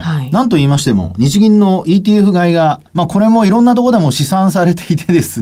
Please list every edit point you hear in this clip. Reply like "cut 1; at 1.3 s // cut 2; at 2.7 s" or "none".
cut 1; at 2.9 s